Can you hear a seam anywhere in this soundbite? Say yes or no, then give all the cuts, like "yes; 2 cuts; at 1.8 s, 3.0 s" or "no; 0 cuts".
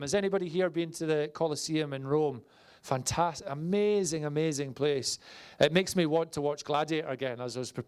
no; 0 cuts